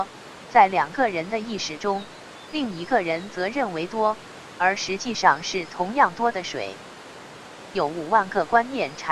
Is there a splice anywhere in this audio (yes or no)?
yes